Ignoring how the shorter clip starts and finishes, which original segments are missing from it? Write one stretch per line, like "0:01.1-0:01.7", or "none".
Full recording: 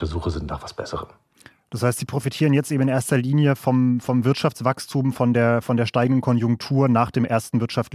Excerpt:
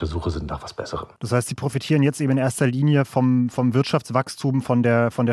0:01.2-0:01.7